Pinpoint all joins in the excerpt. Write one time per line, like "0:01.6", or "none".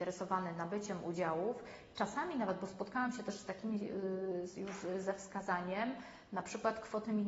none